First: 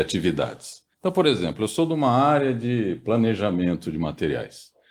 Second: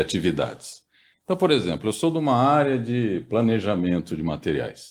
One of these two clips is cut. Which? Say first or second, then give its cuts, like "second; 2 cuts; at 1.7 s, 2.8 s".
first; 1 cut; at 0.9 s